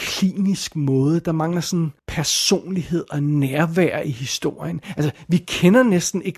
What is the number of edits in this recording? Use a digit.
1